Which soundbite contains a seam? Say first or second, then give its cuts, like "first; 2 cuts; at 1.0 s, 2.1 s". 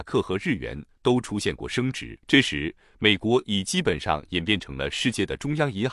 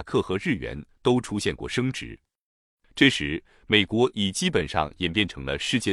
first; 1 cut; at 2.2 s